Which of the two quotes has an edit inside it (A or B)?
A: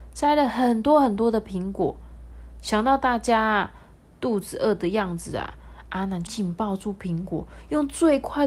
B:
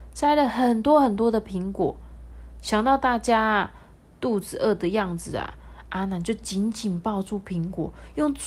A